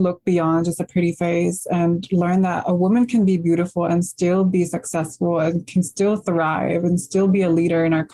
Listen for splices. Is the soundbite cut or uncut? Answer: uncut